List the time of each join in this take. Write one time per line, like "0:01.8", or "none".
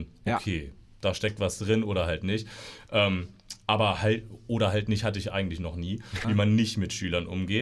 0:06.2